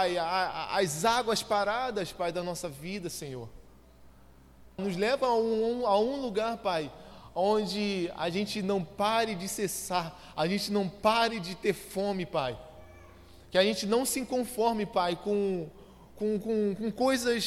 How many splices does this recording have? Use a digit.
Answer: 1